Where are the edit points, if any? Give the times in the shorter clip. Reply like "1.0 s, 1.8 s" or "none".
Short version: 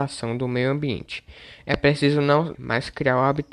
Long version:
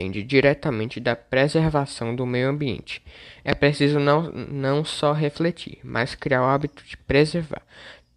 2.5 s